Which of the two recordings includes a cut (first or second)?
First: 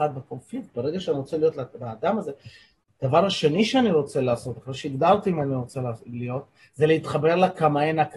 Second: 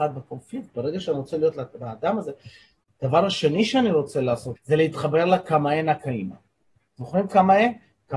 second